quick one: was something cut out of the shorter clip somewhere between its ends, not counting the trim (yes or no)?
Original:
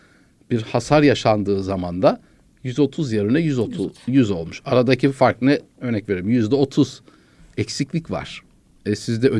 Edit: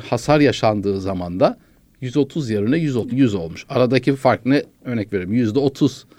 yes